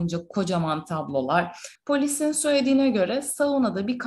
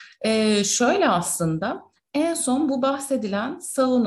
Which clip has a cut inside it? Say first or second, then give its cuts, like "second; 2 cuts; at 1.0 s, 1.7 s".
first; 1 cut; at 1.8 s